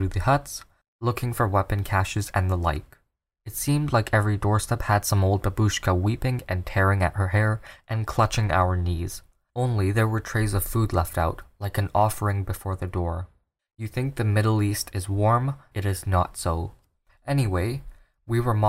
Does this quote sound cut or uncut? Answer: cut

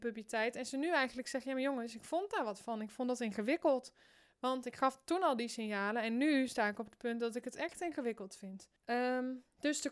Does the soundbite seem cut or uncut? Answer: cut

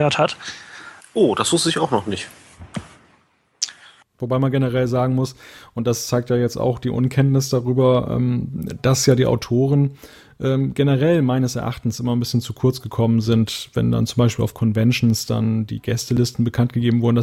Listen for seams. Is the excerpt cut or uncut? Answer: cut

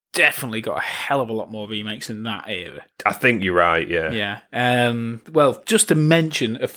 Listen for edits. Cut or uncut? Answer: cut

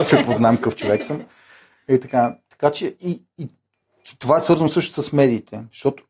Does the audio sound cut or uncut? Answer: uncut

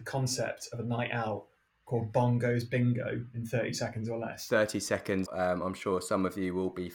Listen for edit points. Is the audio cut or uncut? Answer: cut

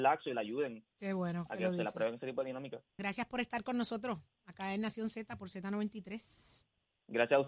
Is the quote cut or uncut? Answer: cut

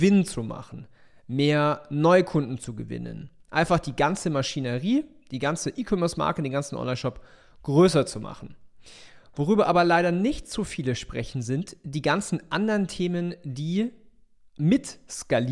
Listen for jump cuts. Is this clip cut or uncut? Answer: uncut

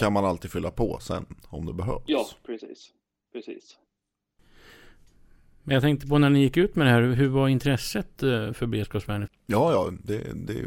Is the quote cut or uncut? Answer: cut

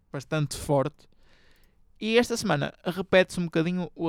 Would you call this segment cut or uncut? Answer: uncut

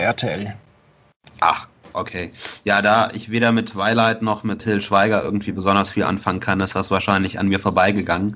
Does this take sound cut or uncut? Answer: cut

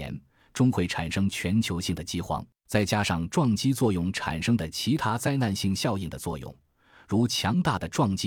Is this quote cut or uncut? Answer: uncut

